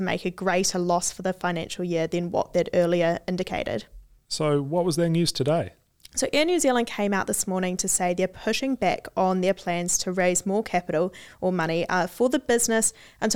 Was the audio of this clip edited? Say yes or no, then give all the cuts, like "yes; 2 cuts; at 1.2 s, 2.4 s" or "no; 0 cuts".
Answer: no; 0 cuts